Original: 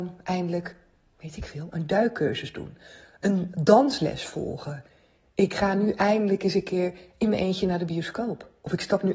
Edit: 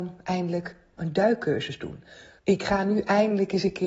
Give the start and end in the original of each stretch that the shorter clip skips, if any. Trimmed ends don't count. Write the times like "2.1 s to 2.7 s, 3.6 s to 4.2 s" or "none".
1.0 s to 1.7 s, 3.1 s to 5.3 s

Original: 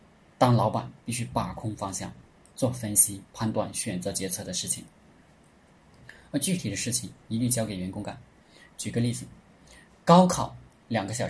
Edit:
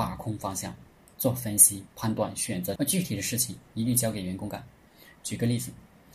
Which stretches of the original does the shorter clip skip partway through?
4.1 s to 6.3 s

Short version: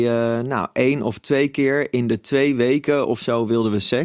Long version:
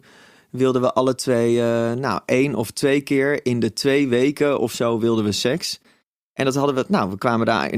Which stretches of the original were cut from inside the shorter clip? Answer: none

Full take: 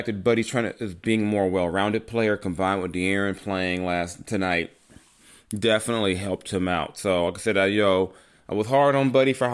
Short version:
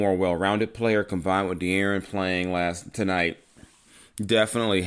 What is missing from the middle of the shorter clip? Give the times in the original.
none

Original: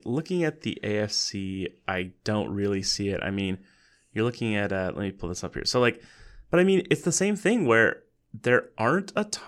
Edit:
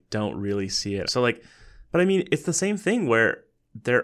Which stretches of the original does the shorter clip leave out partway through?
3.2 s to 5.6 s

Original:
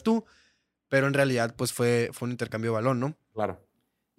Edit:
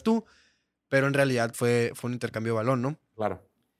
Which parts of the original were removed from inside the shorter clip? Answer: 1.5 s to 1.7 s

